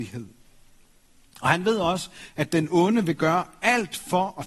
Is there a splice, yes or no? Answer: no